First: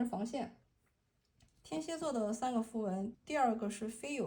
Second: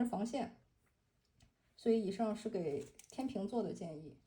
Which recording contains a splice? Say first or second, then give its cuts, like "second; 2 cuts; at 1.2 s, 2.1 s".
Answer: first; 2 cuts; at 1.5 s, 3.1 s